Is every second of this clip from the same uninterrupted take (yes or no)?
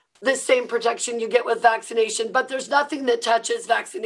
yes